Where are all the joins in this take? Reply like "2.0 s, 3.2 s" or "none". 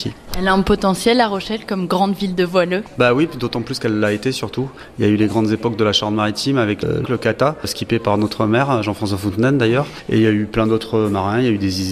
7.0 s